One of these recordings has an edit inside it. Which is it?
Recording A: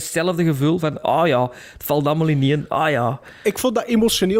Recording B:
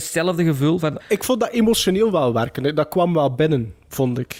B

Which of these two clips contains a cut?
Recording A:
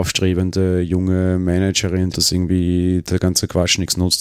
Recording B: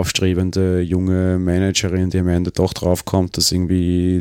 A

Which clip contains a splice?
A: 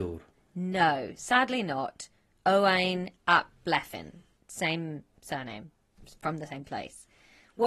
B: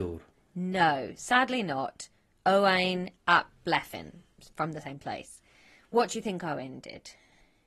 B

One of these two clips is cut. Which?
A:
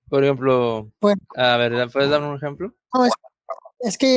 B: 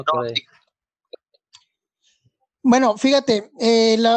A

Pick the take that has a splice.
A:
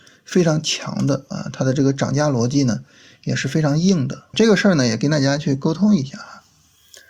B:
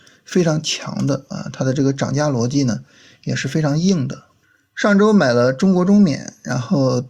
A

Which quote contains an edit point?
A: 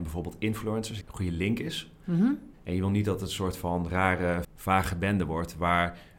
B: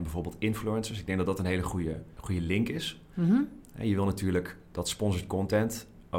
A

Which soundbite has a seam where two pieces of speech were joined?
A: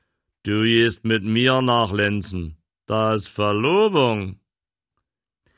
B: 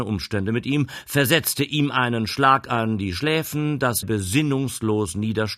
B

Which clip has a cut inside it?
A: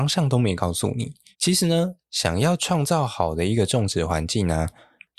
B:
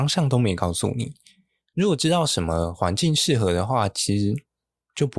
A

